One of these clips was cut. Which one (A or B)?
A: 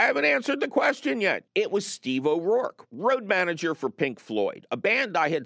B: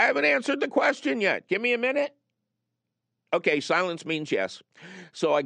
A